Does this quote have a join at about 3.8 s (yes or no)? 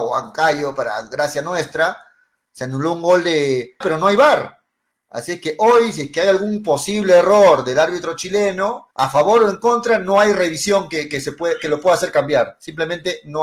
yes